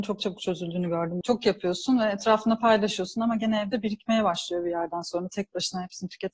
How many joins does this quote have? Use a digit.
1